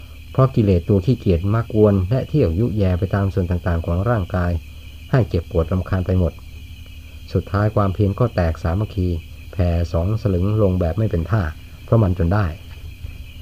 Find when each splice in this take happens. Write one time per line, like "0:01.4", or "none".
0:01.7